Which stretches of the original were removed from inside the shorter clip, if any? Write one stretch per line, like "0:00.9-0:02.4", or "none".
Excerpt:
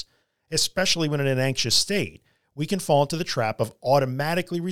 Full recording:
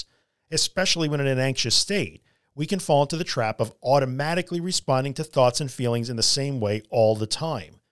none